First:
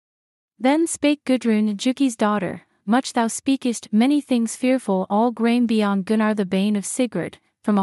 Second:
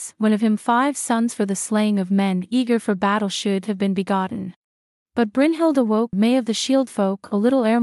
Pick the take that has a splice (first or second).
second